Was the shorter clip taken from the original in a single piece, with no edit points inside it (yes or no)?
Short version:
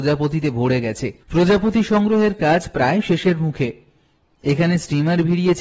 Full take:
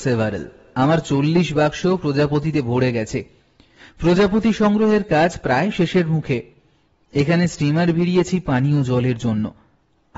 no